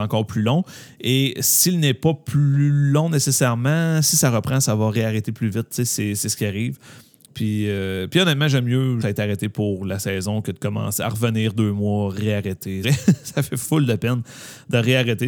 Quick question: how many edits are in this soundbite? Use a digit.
2